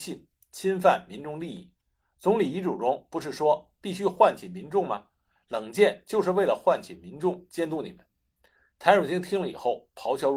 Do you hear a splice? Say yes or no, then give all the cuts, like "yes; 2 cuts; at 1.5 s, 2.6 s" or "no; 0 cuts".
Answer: no; 0 cuts